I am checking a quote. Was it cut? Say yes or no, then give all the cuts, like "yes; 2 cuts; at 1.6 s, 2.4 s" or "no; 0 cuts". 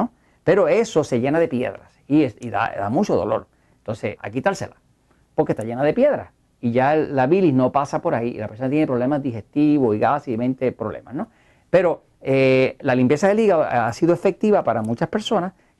yes; 1 cut; at 4.2 s